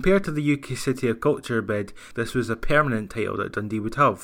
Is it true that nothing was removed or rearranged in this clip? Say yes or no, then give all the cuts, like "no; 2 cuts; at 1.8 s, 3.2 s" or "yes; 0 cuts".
no; 1 cut; at 2.1 s